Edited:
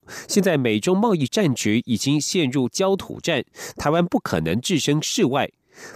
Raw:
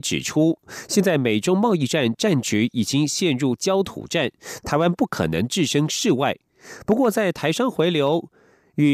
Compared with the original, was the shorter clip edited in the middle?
yes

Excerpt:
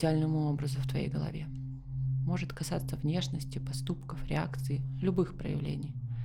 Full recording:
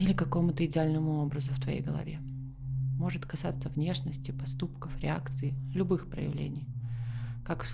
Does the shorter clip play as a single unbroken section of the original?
yes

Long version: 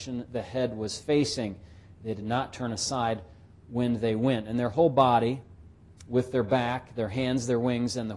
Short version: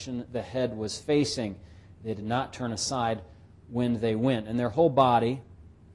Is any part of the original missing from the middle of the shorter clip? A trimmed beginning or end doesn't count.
no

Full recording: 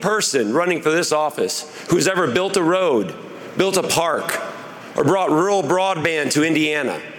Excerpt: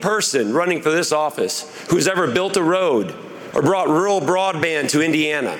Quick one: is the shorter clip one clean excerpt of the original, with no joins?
no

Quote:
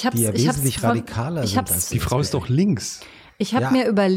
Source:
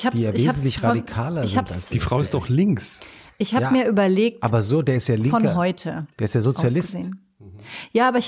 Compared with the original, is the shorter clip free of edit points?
yes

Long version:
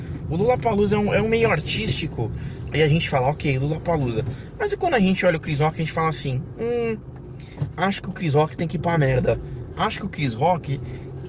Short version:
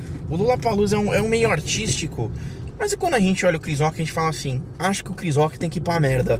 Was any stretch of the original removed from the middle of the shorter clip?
yes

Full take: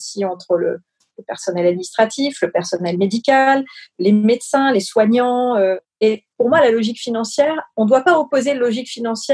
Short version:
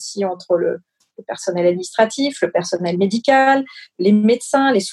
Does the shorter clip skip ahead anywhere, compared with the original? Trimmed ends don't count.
no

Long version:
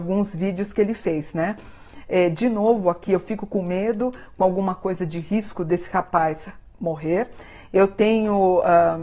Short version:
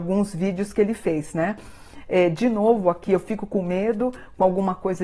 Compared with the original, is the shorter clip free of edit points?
yes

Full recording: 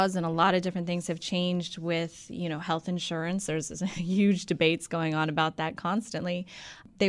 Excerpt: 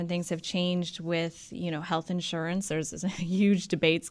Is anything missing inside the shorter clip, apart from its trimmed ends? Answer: no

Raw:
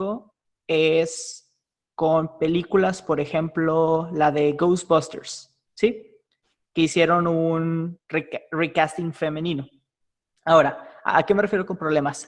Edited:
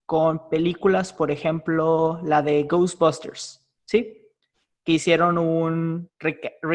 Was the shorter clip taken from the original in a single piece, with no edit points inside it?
yes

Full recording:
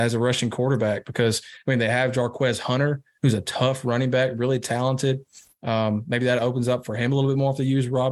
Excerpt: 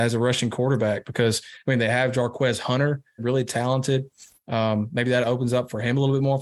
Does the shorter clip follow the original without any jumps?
no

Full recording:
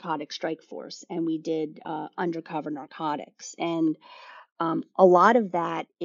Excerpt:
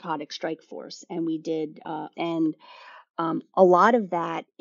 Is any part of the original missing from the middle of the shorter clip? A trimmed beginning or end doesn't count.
yes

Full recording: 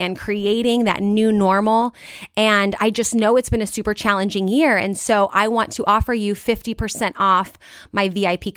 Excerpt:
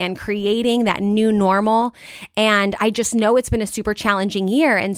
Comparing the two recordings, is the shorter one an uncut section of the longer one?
yes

